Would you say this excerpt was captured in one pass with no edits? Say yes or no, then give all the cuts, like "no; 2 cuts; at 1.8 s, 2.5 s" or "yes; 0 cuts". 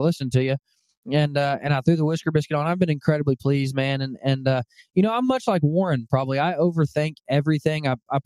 yes; 0 cuts